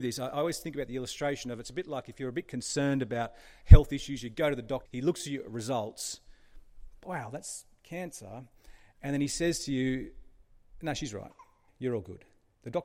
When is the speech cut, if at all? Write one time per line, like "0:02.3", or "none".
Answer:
0:04.9
0:11.7